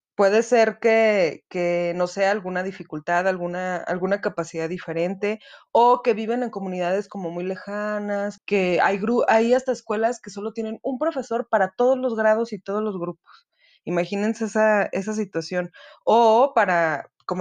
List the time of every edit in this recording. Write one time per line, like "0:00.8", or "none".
0:08.4